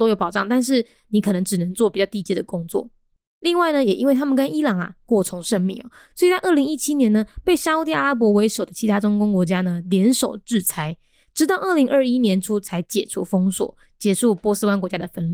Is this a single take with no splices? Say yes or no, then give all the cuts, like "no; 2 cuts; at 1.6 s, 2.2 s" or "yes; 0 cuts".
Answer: yes; 0 cuts